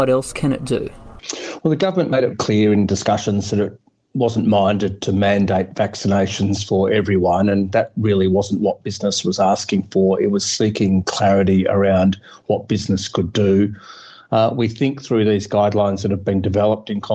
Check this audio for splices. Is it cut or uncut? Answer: cut